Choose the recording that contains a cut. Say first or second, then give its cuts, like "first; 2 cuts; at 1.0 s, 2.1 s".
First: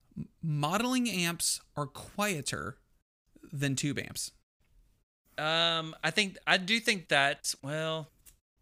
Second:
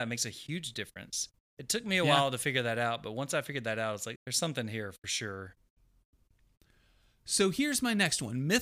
second; 1 cut; at 4.2 s